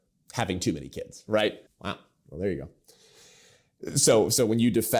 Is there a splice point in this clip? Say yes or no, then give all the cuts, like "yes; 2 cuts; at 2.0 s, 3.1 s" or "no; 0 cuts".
yes; 1 cut; at 1.7 s